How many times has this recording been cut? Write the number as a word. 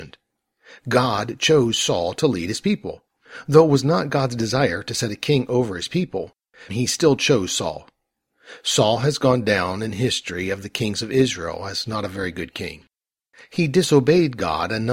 one